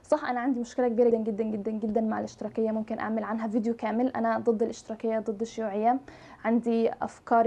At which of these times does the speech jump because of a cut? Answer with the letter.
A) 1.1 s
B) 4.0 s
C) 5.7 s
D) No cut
A